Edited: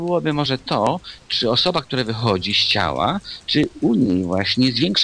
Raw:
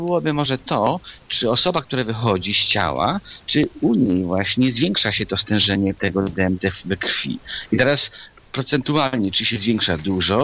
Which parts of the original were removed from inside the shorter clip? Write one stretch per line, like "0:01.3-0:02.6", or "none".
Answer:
none